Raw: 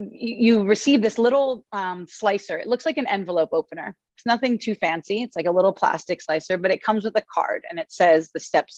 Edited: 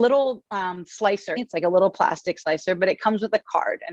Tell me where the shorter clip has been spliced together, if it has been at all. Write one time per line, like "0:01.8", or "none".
0:01.4